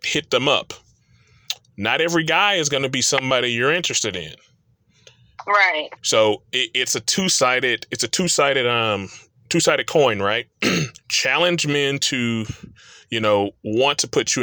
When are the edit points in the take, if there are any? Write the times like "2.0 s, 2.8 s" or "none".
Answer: 6.0 s, 11.0 s